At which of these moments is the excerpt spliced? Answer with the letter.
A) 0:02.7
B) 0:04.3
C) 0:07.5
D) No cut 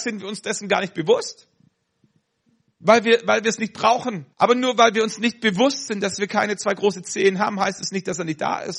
B